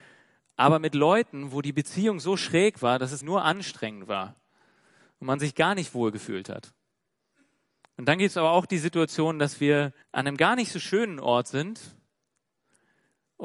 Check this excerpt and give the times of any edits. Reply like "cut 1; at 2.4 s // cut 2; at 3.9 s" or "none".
cut 1; at 3.2 s // cut 2; at 10.0 s